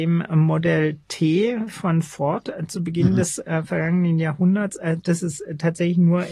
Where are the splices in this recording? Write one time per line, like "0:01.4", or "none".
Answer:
none